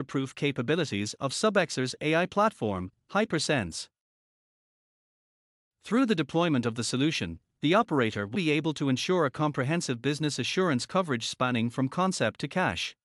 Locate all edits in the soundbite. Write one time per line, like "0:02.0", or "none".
0:08.3